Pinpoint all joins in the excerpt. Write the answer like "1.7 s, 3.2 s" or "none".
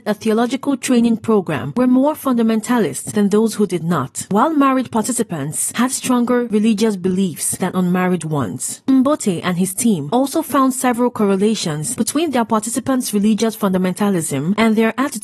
none